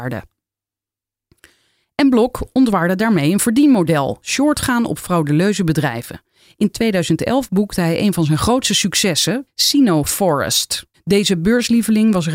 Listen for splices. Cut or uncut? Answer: cut